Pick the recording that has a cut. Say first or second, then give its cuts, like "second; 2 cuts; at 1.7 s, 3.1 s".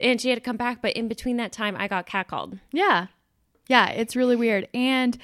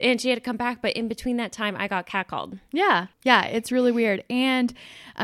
second; 1 cut; at 3.1 s